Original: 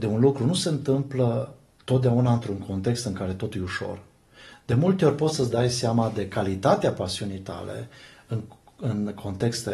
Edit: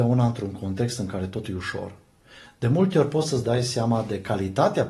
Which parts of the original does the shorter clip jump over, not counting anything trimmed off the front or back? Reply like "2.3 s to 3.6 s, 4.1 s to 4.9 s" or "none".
none